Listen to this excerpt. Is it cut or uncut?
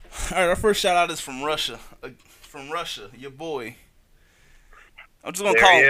uncut